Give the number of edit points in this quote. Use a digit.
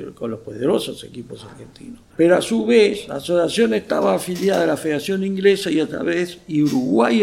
1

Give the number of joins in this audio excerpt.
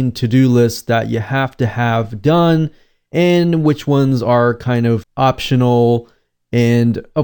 1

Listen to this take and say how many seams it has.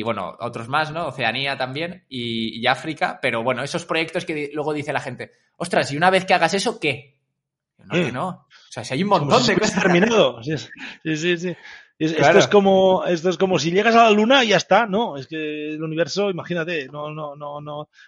0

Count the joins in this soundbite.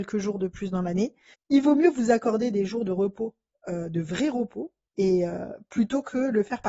2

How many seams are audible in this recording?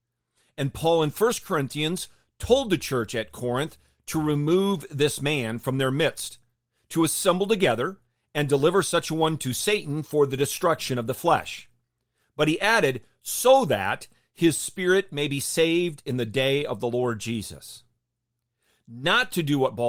0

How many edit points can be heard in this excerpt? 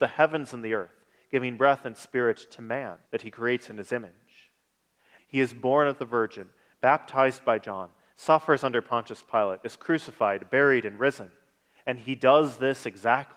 2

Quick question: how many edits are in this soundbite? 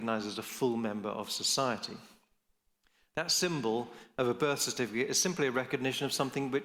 0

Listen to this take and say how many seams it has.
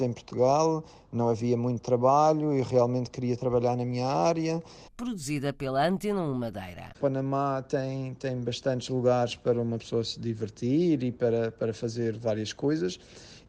2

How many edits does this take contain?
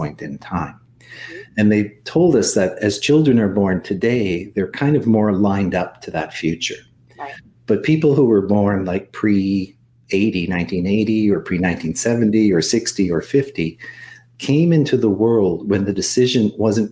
0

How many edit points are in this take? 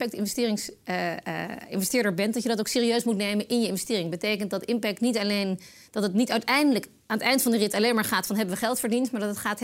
0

